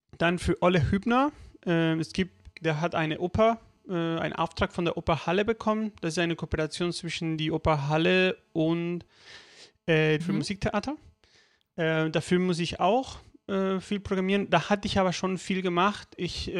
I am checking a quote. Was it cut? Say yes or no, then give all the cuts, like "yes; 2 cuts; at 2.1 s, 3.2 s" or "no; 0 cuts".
yes; 2 cuts; at 2.5 s, 10.2 s